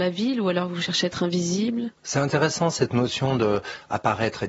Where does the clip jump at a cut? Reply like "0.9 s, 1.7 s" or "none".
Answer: 2.0 s